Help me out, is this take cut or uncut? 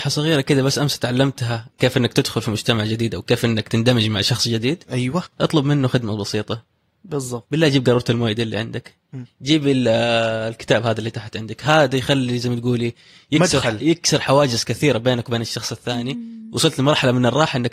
uncut